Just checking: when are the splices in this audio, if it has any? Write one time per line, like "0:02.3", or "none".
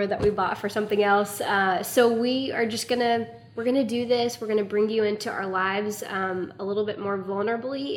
none